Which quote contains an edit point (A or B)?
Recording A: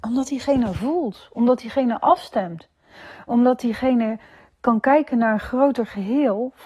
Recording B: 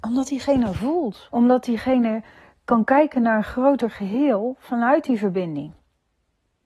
B